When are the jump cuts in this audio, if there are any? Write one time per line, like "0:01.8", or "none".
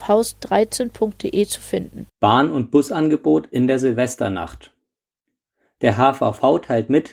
0:02.1